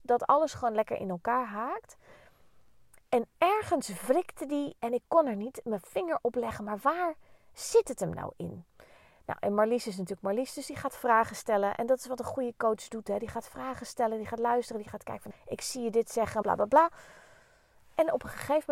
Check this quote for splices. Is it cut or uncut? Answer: cut